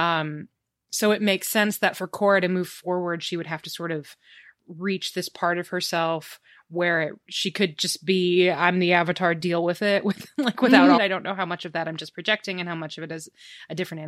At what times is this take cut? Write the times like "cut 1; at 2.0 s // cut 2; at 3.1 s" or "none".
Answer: cut 1; at 11.0 s